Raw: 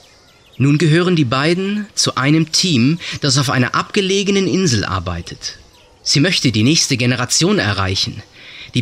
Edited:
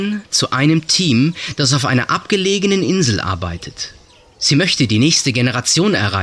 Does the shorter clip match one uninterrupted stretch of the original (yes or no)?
yes